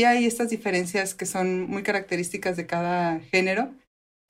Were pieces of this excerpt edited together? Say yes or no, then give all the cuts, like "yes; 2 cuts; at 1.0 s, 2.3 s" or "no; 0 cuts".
no; 0 cuts